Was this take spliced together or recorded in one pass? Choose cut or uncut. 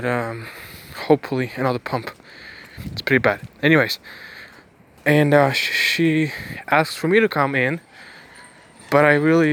cut